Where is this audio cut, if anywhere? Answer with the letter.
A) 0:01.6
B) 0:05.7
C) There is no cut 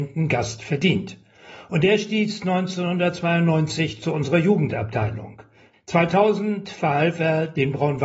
B